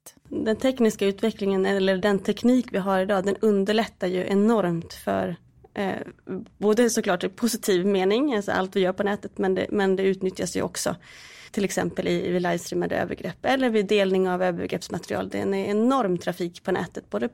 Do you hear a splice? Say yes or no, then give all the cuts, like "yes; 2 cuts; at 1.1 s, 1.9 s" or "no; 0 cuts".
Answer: no; 0 cuts